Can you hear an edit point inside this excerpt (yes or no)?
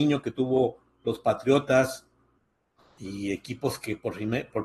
no